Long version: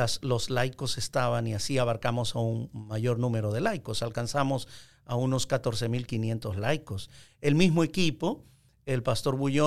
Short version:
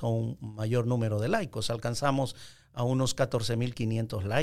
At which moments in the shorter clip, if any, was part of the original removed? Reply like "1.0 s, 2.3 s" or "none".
none